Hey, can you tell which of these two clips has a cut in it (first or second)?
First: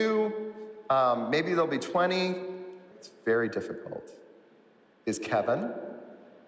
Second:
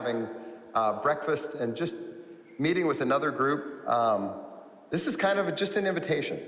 first